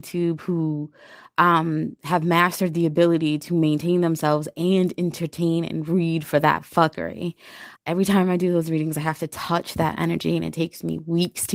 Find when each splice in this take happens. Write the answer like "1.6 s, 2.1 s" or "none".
7.8 s